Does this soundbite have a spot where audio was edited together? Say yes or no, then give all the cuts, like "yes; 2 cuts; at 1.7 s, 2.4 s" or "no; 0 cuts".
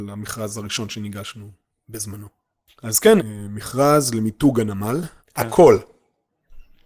yes; 2 cuts; at 3.2 s, 5.2 s